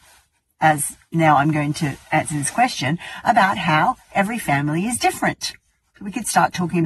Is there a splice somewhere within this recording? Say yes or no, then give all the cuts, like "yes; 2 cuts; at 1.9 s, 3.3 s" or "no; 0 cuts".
no; 0 cuts